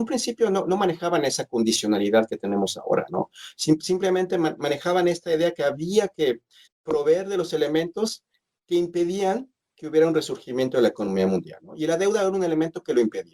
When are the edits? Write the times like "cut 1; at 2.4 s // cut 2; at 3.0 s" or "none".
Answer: cut 1; at 6.7 s